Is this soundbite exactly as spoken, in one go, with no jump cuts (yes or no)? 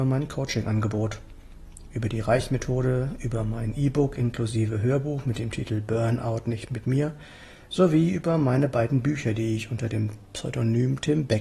yes